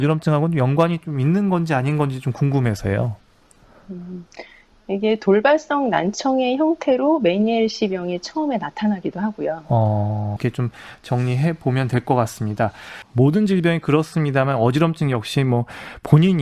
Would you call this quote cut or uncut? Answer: cut